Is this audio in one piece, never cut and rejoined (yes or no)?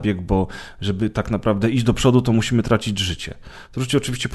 yes